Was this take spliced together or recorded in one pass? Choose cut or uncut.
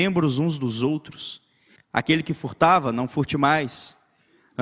cut